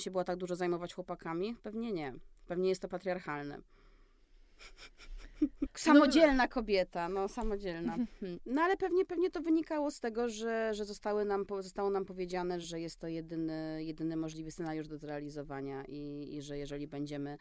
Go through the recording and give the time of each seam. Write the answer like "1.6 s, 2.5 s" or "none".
5.6 s, 8.4 s, 12.6 s